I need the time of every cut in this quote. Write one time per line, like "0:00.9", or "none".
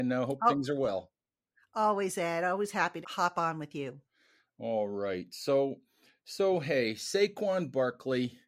0:03.0